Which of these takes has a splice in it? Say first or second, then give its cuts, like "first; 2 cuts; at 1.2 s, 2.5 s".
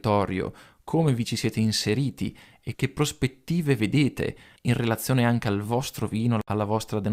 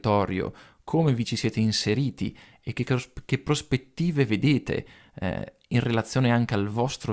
first; 2 cuts; at 2.7 s, 4.6 s